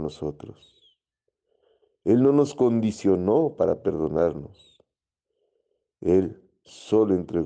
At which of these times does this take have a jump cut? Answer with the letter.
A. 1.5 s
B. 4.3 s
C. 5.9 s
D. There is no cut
D